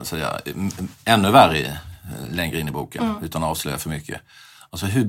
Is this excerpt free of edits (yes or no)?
yes